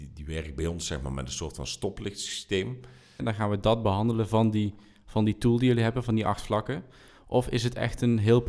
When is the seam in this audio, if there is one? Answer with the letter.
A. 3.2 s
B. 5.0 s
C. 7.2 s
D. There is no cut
A